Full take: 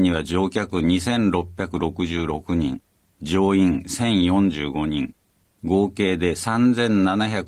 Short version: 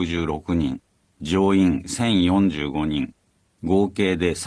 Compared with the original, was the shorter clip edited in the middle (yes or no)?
no